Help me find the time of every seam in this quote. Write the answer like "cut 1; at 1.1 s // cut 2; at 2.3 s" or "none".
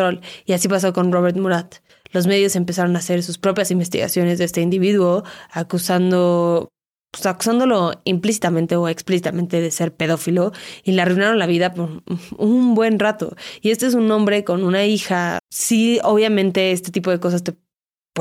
cut 1; at 15.4 s